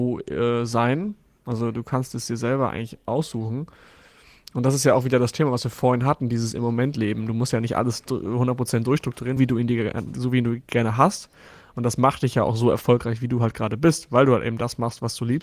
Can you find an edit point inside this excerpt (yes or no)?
yes